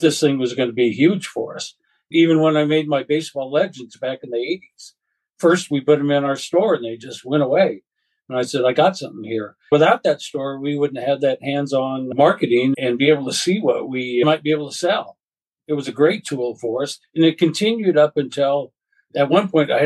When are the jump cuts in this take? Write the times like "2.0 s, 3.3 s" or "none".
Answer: none